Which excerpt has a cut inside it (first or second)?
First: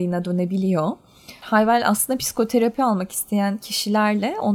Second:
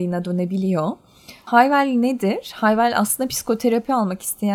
first